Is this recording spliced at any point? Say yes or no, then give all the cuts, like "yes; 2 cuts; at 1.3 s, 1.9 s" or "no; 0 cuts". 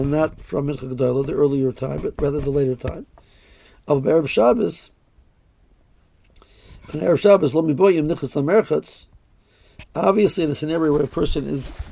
no; 0 cuts